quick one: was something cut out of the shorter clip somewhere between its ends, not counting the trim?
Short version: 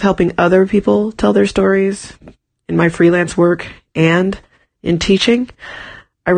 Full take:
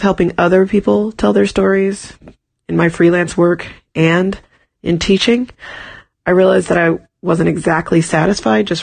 no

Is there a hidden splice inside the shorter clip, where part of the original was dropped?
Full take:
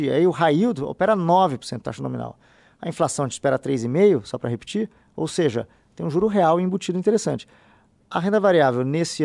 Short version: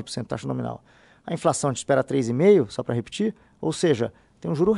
no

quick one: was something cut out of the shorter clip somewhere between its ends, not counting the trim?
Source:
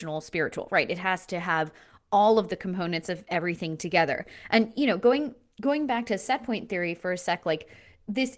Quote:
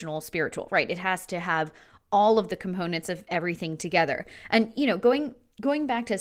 no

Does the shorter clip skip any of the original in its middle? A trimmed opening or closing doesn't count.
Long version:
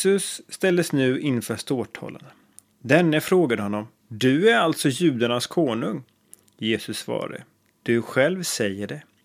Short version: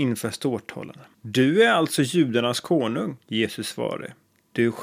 yes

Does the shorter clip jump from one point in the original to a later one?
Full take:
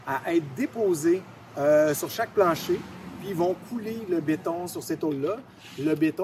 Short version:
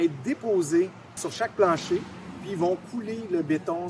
yes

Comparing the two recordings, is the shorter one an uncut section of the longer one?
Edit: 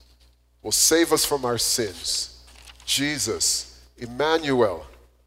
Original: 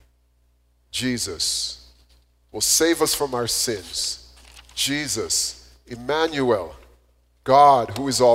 yes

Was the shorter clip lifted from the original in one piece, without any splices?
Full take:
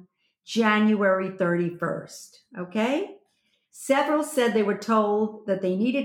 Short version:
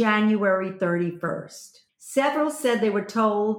no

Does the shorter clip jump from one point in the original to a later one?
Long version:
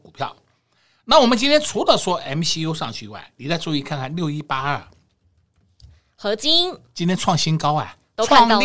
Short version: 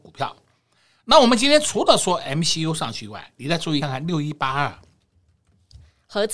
yes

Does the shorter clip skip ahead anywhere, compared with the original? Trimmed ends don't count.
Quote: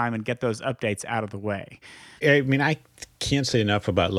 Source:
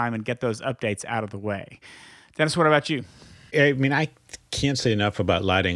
yes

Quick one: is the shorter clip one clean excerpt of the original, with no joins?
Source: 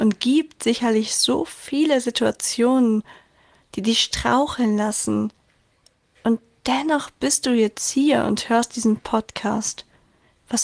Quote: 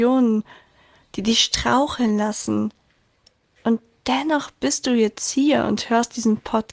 yes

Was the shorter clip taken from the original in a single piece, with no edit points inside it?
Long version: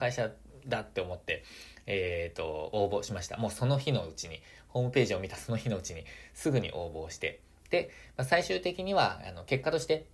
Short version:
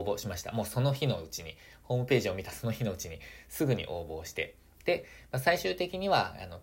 yes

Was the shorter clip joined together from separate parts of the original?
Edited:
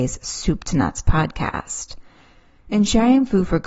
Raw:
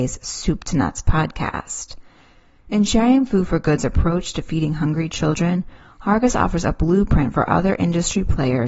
no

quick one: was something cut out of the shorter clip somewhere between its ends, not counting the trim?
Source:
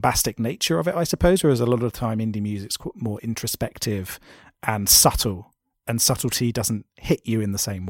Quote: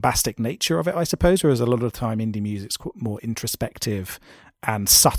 no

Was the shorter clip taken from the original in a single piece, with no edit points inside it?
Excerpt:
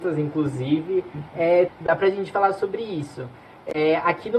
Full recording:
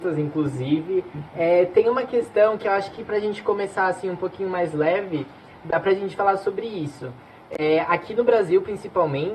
no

